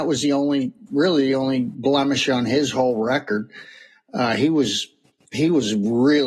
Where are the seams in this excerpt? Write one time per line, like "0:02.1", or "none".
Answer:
none